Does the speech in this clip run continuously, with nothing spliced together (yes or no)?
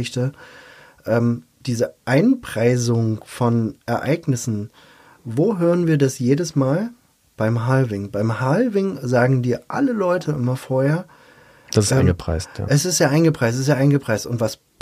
no